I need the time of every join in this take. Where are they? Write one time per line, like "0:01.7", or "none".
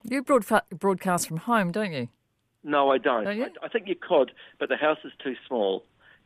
none